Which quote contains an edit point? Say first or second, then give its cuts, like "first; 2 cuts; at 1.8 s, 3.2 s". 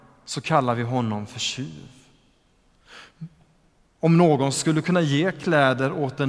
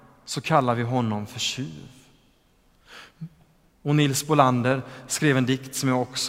second; 1 cut; at 3.7 s